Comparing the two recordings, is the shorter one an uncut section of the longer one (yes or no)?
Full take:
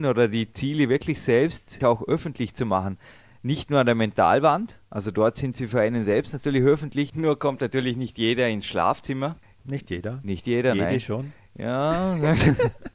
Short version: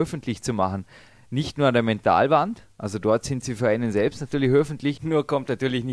yes